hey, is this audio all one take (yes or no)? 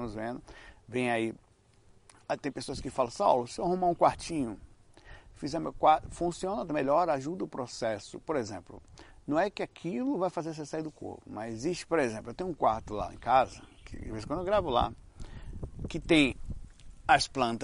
yes